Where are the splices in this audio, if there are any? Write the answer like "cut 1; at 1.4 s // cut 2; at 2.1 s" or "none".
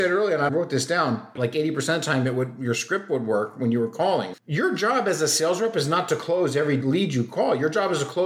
cut 1; at 1.4 s // cut 2; at 4.4 s